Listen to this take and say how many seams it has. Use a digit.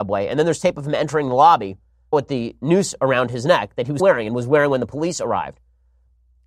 2